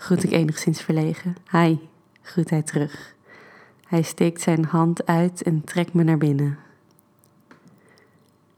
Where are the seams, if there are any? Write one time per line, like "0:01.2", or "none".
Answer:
0:01.4